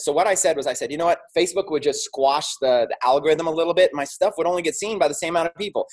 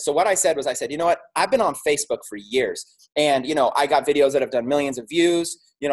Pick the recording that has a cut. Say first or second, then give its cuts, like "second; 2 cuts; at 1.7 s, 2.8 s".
first; 1 cut; at 1.3 s